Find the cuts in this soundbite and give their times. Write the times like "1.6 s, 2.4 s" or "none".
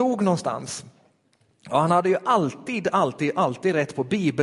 none